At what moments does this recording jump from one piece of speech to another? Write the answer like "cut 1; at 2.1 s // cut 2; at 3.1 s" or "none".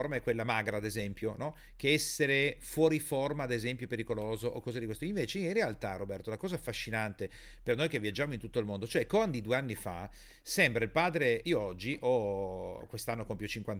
none